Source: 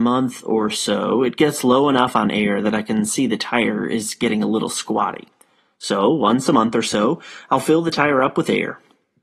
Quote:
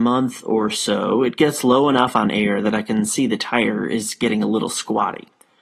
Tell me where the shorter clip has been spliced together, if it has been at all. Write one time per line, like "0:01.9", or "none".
none